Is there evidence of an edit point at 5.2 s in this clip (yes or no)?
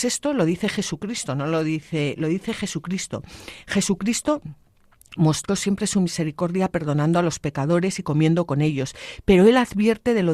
yes